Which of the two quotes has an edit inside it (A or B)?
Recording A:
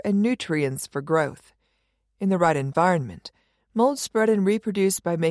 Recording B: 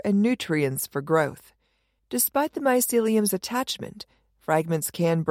B